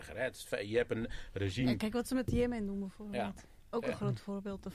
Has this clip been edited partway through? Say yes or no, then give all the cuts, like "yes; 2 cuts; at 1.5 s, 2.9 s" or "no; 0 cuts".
no; 0 cuts